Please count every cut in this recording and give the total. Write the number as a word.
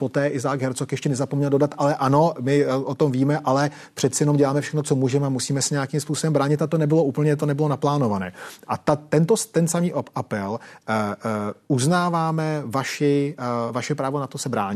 zero